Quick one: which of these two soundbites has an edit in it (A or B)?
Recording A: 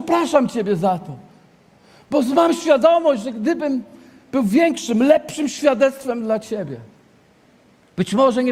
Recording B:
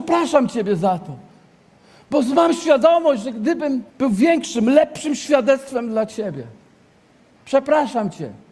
B